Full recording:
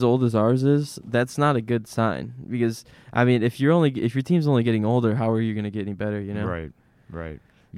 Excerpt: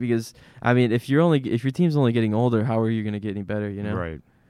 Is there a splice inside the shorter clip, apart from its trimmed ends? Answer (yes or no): no